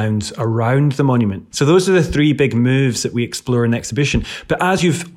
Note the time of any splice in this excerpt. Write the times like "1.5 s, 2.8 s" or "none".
1.5 s